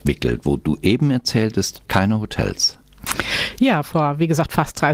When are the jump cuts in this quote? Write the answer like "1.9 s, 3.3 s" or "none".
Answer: 1.8 s